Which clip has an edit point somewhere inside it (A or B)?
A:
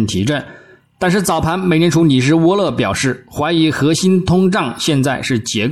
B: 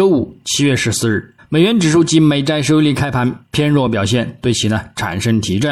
B